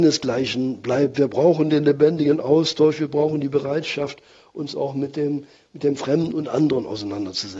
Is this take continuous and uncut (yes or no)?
yes